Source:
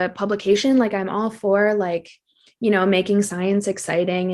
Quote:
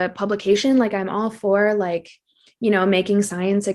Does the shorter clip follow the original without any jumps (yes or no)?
yes